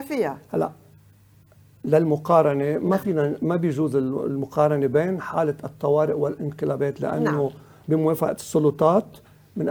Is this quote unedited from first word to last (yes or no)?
no